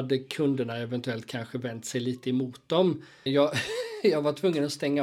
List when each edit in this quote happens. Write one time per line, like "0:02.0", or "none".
0:03.3